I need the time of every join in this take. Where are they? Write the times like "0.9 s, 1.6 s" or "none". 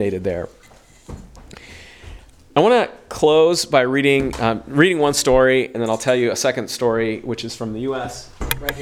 5.7 s